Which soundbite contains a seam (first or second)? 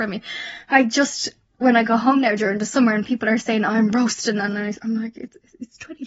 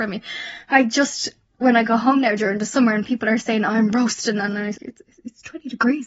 second